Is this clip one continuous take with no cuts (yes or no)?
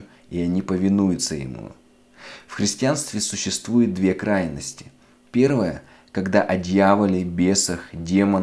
yes